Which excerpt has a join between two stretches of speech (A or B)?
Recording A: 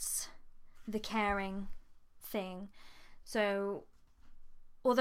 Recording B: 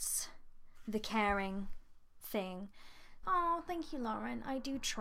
B